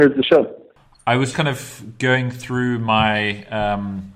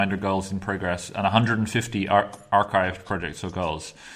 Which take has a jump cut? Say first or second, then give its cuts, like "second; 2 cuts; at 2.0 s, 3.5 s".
first; 1 cut; at 1.3 s